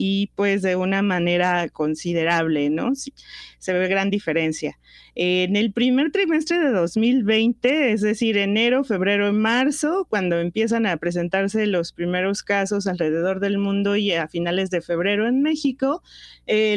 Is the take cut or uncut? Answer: uncut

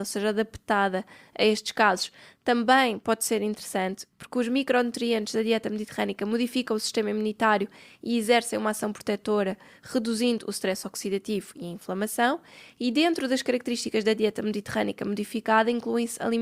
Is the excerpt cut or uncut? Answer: uncut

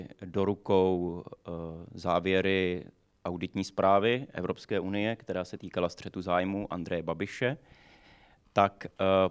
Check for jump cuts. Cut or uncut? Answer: uncut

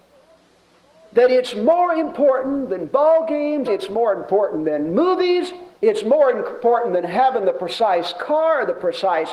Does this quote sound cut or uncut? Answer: cut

